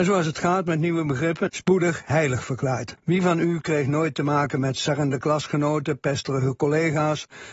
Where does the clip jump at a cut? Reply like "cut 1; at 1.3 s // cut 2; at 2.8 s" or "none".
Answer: cut 1; at 1.5 s // cut 2; at 3.0 s

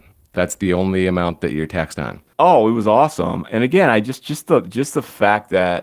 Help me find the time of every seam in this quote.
cut 1; at 2.3 s

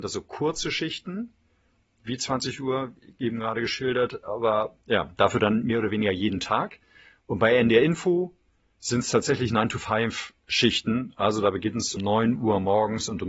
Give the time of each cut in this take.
cut 1; at 4.8 s // cut 2; at 12.0 s

